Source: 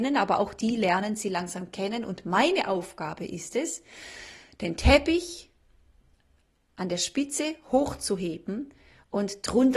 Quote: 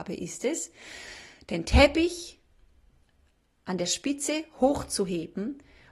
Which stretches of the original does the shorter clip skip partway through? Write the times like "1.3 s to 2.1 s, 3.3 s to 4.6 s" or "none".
none